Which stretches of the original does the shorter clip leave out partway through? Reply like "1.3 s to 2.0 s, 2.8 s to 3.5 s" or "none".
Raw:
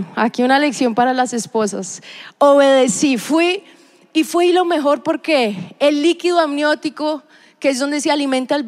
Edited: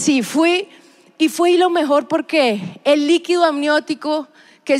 none